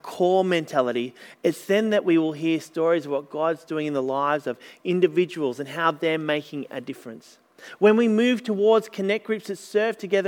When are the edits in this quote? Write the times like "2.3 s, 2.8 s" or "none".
none

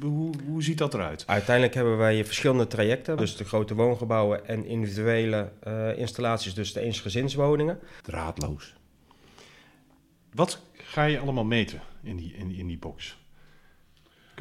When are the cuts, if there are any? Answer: 3.2 s, 8.0 s

